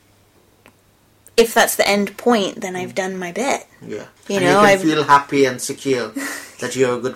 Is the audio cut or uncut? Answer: cut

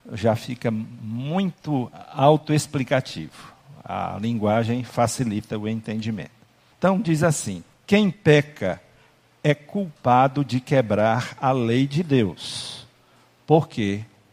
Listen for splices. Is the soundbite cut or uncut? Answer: uncut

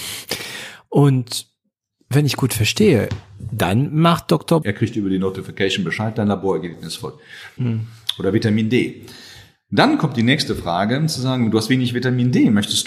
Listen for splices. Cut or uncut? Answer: cut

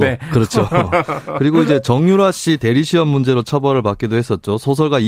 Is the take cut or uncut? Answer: uncut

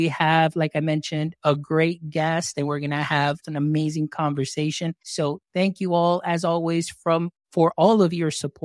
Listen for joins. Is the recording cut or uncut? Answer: cut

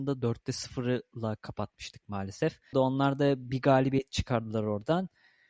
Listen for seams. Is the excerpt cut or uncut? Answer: cut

